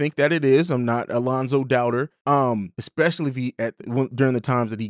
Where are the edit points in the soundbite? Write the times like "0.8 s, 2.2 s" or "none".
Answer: 2.7 s

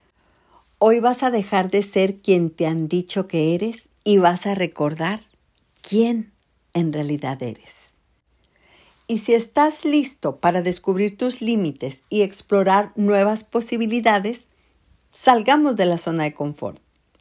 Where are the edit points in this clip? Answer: none

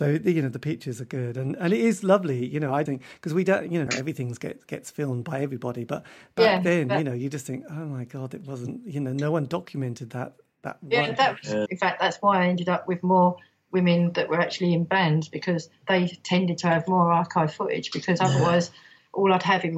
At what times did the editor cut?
2.9 s, 3.9 s, 11.7 s

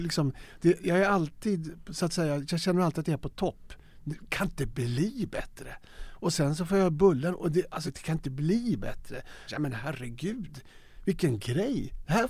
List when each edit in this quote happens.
7.9 s, 9.5 s

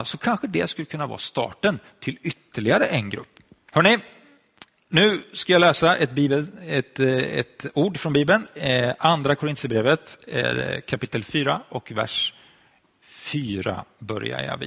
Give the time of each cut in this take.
3.7 s

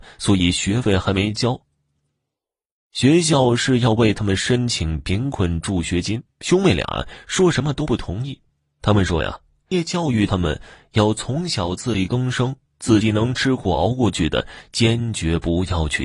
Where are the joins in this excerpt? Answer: 6.3 s, 9.7 s

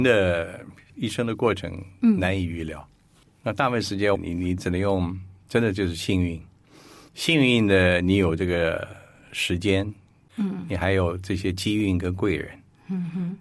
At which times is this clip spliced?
4.1 s

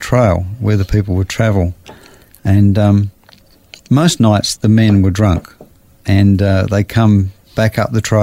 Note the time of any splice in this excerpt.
4.6 s

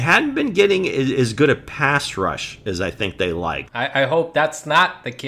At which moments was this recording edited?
3.6 s

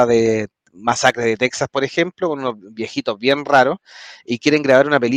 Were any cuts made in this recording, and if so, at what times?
none

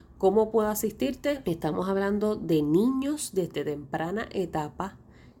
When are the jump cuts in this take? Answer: 1.4 s

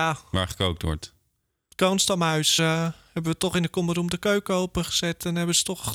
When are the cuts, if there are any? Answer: none

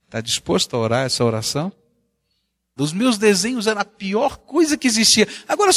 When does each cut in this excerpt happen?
2.8 s

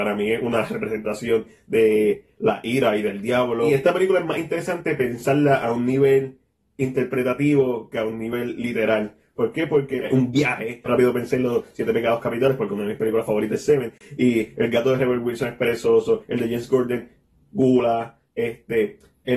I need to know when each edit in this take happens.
10.9 s

